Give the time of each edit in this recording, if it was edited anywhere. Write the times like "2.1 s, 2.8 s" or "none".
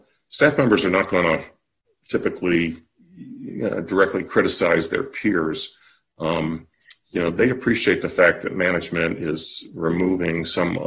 none